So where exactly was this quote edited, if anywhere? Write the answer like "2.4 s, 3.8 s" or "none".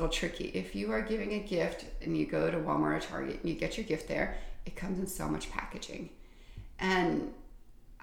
2.0 s